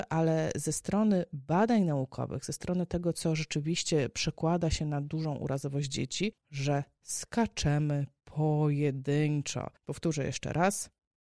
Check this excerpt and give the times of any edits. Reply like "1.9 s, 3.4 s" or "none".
6.4 s, 9.8 s